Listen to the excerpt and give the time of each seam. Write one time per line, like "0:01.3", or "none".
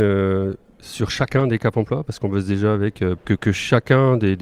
0:03.2